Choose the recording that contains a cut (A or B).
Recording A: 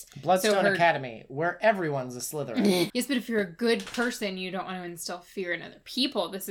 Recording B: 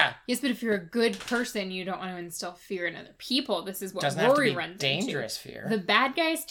A